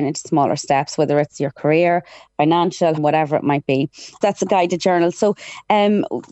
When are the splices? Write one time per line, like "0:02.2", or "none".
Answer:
0:03.0
0:04.2